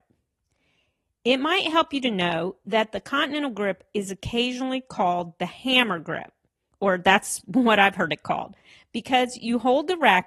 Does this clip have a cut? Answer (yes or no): no